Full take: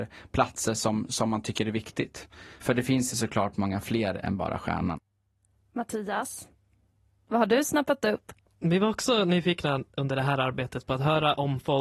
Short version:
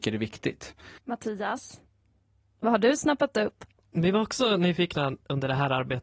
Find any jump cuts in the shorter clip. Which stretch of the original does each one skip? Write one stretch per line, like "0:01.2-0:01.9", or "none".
0:02.5-0:05.7